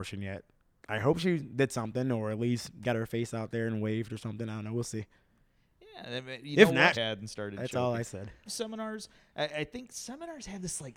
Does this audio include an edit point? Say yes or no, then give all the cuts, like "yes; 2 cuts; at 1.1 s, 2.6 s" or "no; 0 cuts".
yes; 2 cuts; at 6.9 s, 8.5 s